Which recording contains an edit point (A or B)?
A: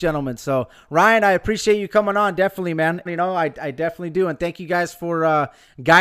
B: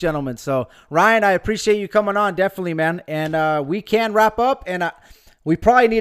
A